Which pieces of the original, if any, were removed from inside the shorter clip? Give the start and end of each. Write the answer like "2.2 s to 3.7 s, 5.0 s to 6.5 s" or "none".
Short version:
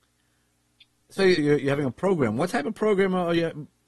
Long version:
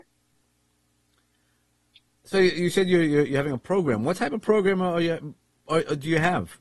2.5 s to 3.0 s